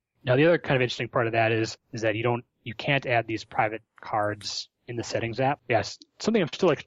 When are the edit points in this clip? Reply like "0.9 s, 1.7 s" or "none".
1.8 s, 5.6 s